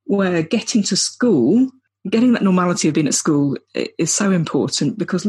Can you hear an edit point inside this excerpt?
no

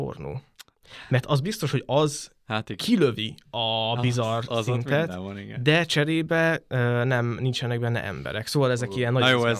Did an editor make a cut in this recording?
no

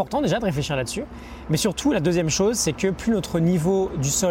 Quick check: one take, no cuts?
yes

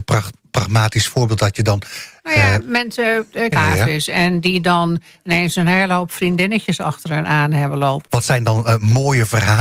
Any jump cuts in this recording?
yes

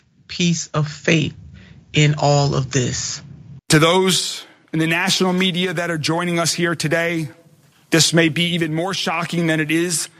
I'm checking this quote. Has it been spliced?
yes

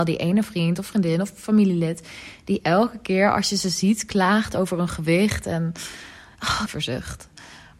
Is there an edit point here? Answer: yes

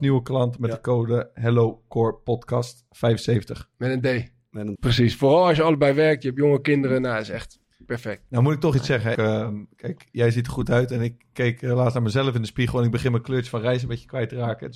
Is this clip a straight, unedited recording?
no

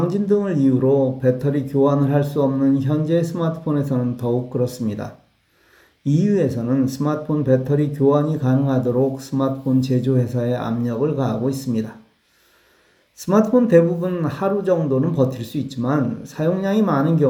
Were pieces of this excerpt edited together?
no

